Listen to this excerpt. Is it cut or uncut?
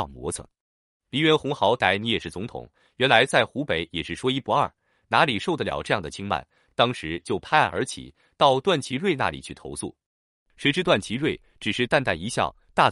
uncut